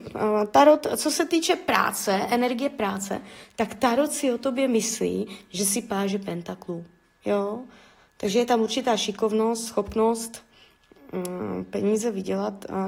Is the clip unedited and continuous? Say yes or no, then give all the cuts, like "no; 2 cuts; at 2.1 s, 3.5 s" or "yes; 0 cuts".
yes; 0 cuts